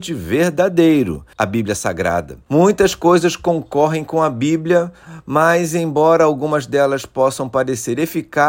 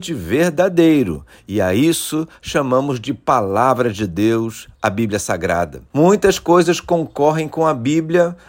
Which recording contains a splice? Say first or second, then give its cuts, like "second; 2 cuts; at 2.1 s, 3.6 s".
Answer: first; 1 cut; at 1.3 s